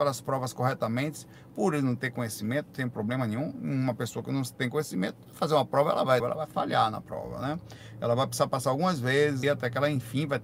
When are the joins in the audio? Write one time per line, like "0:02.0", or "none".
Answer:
0:06.2
0:09.4